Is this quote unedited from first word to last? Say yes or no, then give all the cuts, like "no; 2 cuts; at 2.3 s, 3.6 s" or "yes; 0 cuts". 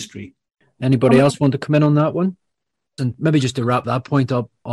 no; 1 cut; at 3.0 s